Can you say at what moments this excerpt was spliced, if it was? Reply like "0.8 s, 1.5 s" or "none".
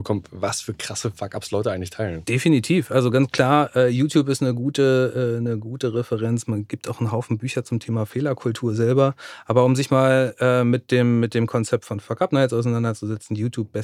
none